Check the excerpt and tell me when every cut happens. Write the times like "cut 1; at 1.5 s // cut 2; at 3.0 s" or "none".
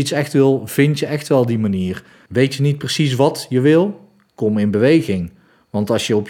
cut 1; at 2.3 s